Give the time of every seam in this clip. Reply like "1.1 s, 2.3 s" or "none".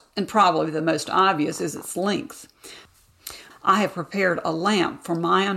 3.5 s